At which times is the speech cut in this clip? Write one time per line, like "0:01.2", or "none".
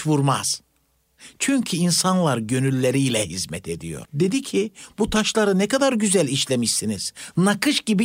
0:01.4
0:04.1